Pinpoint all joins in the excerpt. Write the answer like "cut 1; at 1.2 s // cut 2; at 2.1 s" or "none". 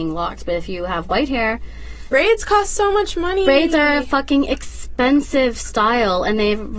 cut 1; at 2.1 s